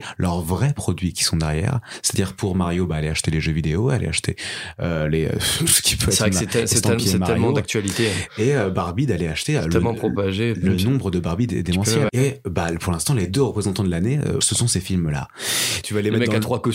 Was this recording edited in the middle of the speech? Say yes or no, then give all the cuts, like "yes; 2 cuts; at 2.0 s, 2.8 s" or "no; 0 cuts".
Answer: yes; 3 cuts; at 12.1 s, 14.4 s, 15.8 s